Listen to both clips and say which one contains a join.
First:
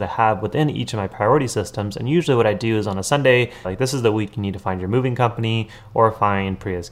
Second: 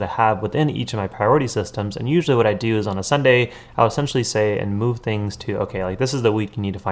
first; 1 cut; at 3.6 s

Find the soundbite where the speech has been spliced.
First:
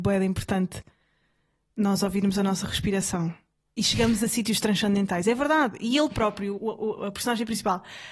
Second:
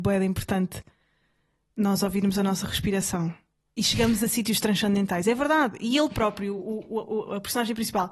first; 1 cut; at 6.6 s

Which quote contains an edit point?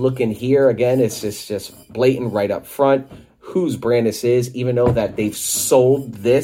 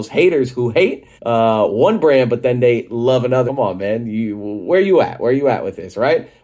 second; 2 cuts; at 1.2 s, 3.5 s

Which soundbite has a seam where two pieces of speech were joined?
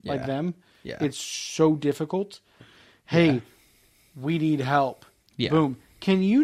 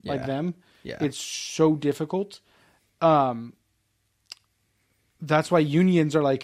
first; 1 cut; at 2.6 s

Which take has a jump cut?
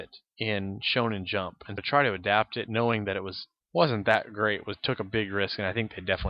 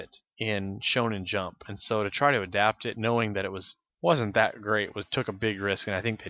first; 1 cut; at 1.8 s

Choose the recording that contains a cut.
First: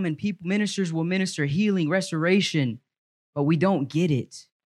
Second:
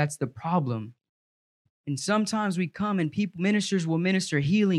second; 1 cut; at 1.7 s

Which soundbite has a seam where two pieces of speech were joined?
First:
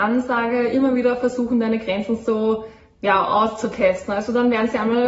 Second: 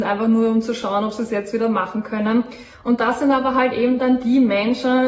second; 1 cut; at 2.7 s

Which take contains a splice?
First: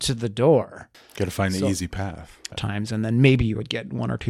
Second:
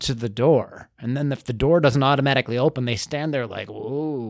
first; 2 cuts; at 0.9 s, 2.5 s

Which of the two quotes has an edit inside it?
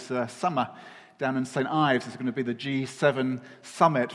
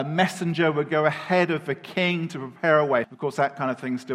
second; 1 cut; at 3.0 s

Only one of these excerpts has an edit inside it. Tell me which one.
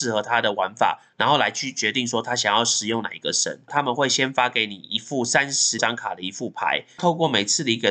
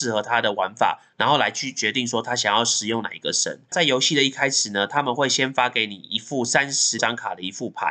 first; 1 cut; at 3.7 s

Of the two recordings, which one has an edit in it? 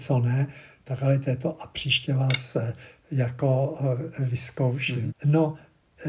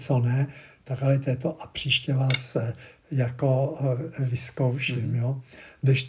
first; 1 cut; at 5.1 s

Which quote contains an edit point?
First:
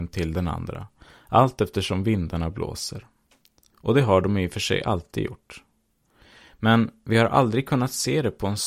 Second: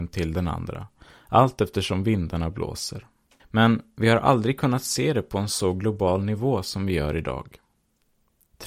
second; 1 cut; at 3.4 s

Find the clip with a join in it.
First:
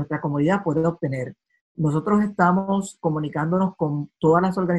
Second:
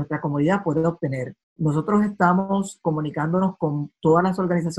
second; 1 cut; at 1.4 s

